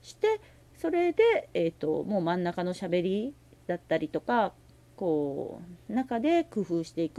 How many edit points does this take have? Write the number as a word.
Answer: zero